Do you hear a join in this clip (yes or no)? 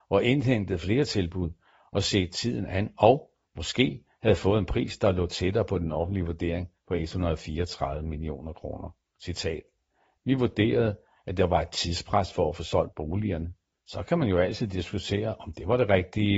yes